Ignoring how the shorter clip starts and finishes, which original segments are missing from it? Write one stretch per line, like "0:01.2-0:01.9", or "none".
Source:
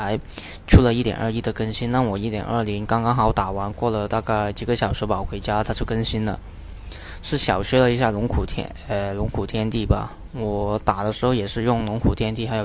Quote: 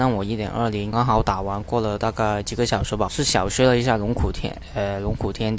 0:02.9-0:03.0
0:05.2-0:07.2